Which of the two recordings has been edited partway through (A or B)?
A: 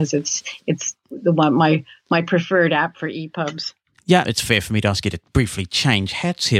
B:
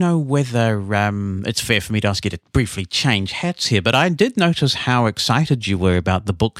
A